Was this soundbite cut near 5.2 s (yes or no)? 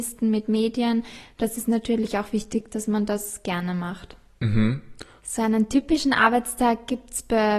yes